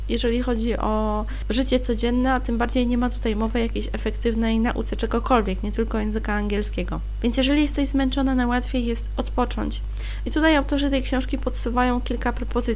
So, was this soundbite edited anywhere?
no; 0 cuts

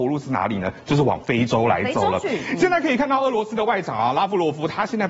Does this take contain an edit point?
no; 0 cuts

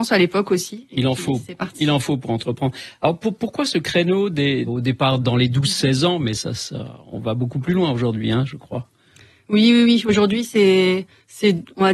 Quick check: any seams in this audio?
yes; 1 cut; at 4.7 s

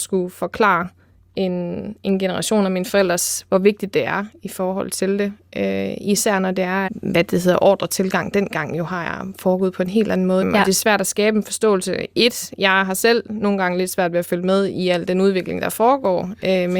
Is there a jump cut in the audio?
yes; 2 cuts; at 6.9 s, 10.4 s

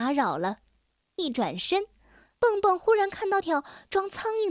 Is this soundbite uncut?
no; 1 cut; at 3.4 s

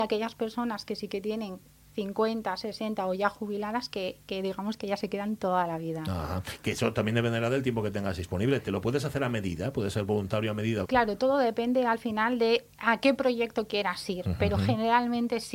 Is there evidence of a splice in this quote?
yes; 1 cut; at 10.8 s

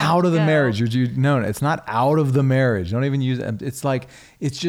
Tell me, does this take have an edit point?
no; 0 cuts

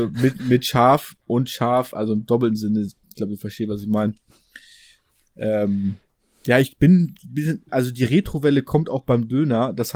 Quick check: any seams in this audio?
no; 0 cuts

